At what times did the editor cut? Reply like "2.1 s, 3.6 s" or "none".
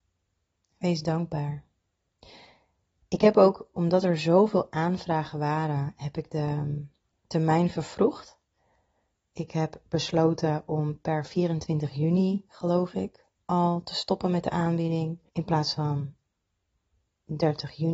15.3 s